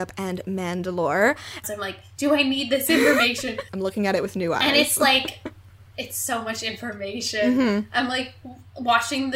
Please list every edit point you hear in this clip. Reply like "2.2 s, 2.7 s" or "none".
1.6 s, 3.7 s